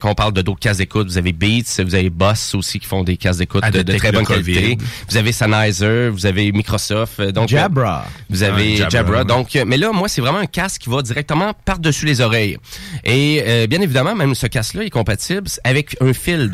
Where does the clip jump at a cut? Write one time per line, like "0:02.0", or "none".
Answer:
none